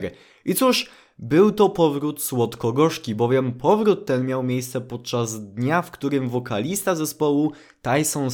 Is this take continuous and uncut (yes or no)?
yes